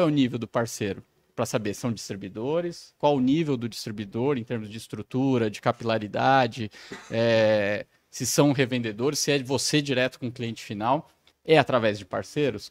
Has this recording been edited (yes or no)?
yes